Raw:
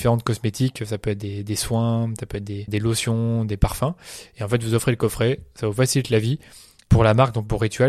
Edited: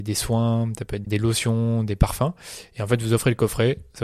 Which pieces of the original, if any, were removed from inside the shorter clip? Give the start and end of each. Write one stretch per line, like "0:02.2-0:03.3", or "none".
0:02.5-0:02.7

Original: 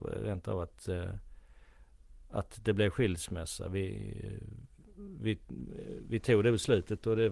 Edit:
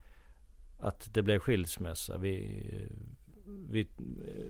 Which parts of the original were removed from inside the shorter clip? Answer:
none

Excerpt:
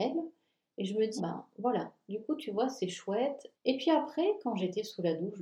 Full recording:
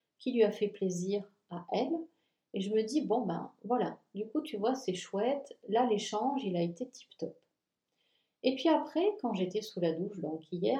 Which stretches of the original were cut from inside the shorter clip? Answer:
0:02.9-0:03.2
0:05.6-0:08.3

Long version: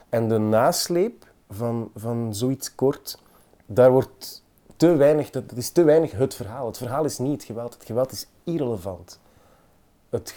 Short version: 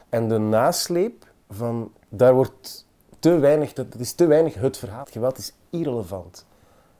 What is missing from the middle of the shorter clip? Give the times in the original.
0:01.9-0:03.5
0:06.6-0:07.7

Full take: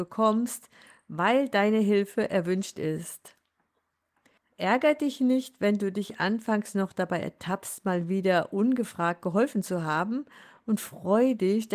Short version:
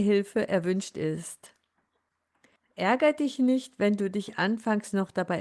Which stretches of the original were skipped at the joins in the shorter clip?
none

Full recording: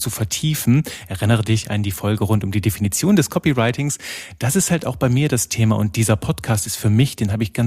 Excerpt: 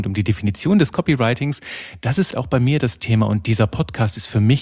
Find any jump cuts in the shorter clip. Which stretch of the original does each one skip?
0:04.7-0:04.8

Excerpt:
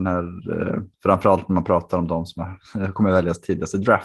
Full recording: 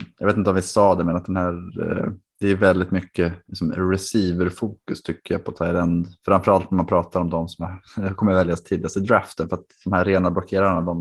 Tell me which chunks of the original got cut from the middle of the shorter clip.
0:02.2-0:06.2

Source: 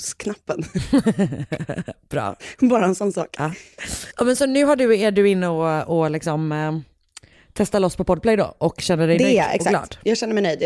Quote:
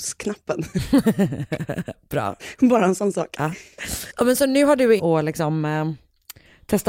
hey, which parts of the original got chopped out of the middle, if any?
0:05.0-0:05.9

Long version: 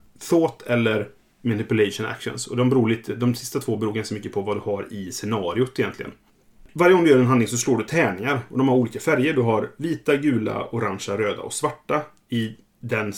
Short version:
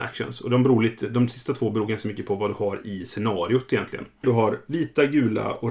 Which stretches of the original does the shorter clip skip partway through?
0:06.3-0:09.3

